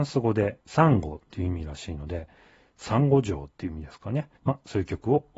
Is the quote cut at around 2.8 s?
no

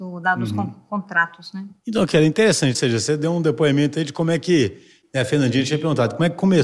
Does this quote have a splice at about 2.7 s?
yes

